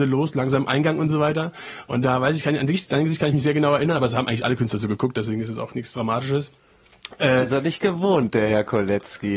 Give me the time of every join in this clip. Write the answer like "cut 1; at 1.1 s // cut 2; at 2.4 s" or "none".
none